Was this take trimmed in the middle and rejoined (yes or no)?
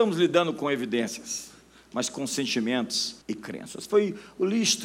yes